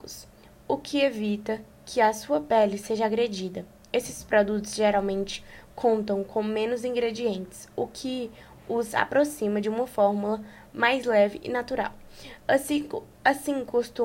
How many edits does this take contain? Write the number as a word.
zero